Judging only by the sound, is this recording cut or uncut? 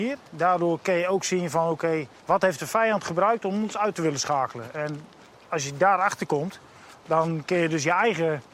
cut